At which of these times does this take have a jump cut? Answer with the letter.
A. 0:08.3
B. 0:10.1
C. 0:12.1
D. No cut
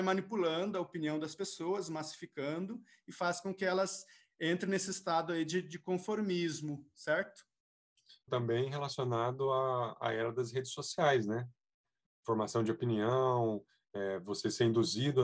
A